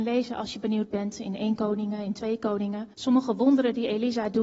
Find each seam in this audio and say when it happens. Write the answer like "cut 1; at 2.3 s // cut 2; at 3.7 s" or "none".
cut 1; at 2.9 s